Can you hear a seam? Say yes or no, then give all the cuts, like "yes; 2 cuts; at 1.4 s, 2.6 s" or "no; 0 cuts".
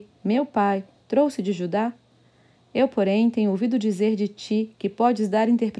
yes; 1 cut; at 2.6 s